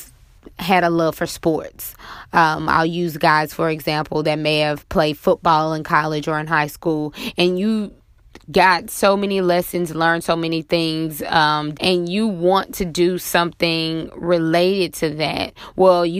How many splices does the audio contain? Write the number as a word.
one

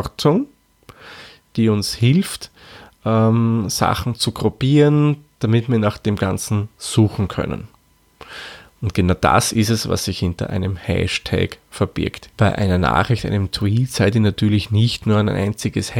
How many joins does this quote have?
one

